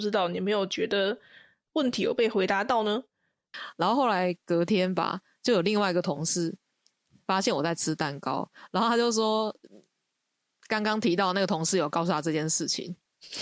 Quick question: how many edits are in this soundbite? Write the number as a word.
one